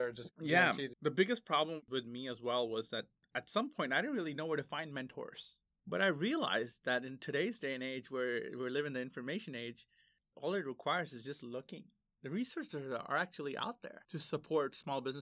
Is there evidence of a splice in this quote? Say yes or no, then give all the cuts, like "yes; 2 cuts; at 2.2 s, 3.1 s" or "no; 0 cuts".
yes; 1 cut; at 0.9 s